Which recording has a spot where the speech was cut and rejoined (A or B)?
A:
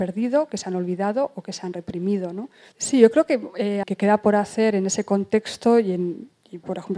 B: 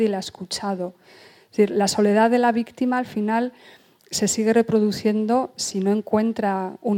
A